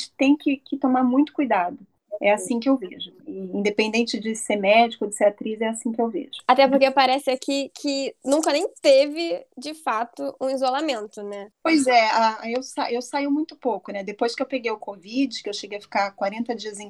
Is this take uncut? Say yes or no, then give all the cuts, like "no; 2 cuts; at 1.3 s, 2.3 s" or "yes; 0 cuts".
yes; 0 cuts